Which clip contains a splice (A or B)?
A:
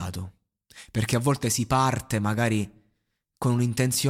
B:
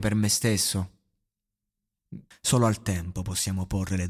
B